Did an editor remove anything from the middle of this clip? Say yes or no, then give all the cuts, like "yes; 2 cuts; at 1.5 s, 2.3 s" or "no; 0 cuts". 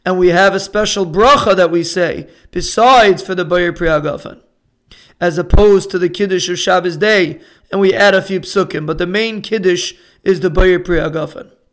yes; 1 cut; at 7.6 s